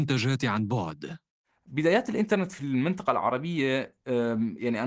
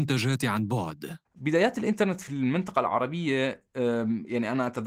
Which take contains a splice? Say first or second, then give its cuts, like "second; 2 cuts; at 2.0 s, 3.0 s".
second; 1 cut; at 1.2 s